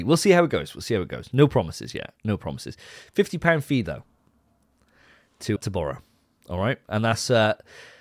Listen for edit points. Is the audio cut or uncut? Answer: cut